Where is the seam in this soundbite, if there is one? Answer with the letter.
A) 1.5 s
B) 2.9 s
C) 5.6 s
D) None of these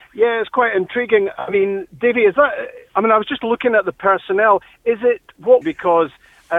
C